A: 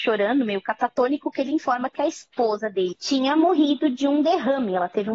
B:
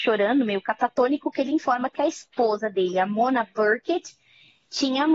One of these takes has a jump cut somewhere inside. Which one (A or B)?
A